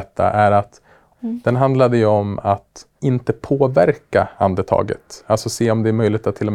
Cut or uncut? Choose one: cut